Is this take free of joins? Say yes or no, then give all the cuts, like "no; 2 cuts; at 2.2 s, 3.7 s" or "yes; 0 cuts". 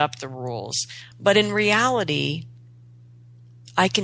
no; 1 cut; at 1.1 s